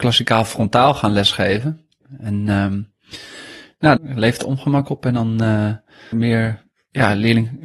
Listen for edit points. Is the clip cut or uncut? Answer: cut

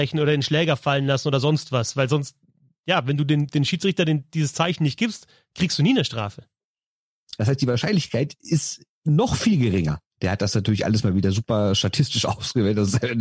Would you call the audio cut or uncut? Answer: cut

